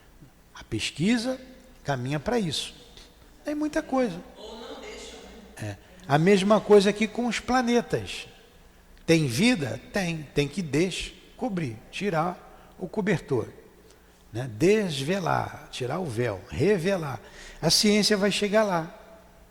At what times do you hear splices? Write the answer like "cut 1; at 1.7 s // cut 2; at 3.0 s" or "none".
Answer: none